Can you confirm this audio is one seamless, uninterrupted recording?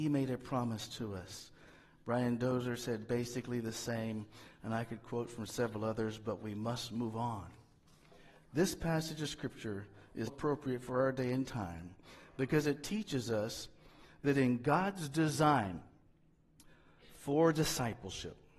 no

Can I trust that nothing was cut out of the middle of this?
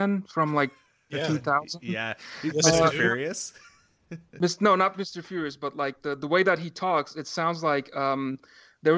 yes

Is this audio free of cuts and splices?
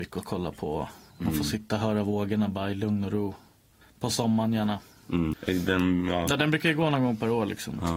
no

